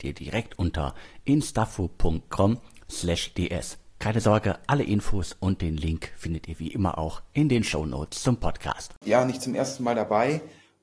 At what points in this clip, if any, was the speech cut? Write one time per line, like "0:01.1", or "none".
0:04.0
0:09.0